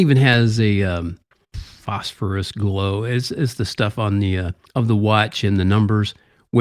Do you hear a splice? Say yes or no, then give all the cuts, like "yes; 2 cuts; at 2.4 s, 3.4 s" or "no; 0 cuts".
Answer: yes; 1 cut; at 4.7 s